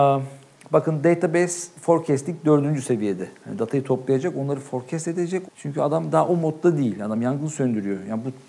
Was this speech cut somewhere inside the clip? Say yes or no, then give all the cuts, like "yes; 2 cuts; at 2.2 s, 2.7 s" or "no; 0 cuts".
yes; 1 cut; at 5.4 s